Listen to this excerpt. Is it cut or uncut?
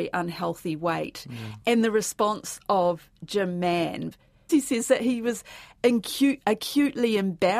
uncut